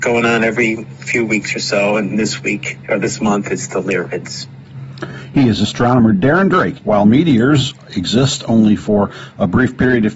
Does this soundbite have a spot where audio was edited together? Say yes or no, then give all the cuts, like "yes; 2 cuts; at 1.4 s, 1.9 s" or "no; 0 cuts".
yes; 1 cut; at 6.8 s